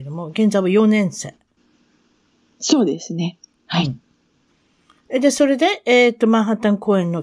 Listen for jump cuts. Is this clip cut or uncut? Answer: uncut